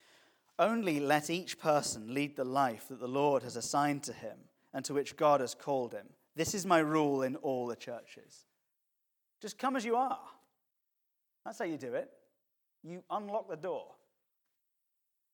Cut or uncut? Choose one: uncut